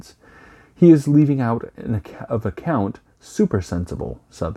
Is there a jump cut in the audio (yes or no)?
no